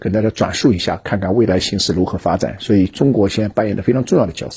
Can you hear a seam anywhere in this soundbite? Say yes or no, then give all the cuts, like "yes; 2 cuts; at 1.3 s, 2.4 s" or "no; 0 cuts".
no; 0 cuts